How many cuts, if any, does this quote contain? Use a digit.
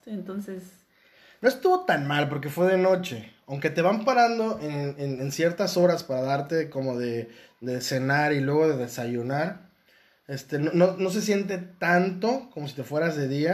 0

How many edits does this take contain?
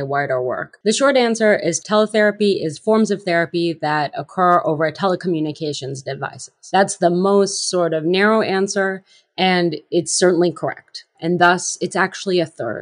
1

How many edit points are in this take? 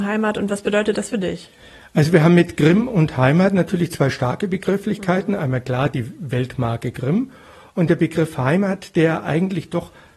0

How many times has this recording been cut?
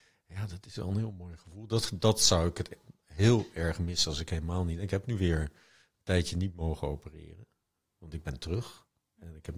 0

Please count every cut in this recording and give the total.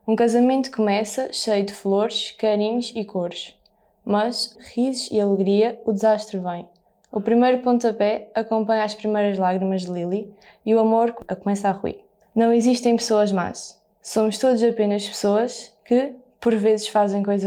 1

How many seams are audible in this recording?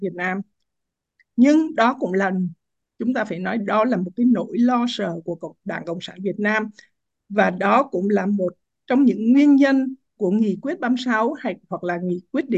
1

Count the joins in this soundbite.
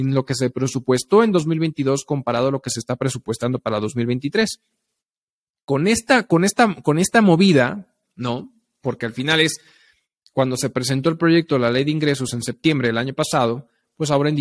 1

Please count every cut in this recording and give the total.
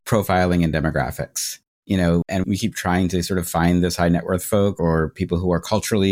1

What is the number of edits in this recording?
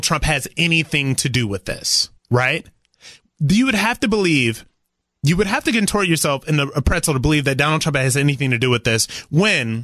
1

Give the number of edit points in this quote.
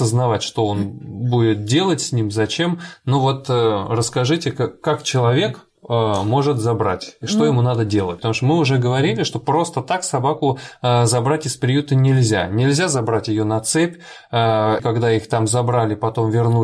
2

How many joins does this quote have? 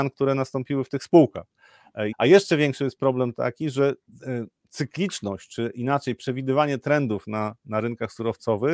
1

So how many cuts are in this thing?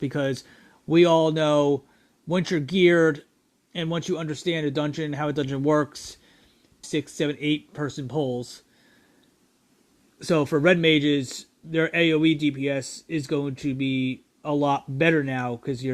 1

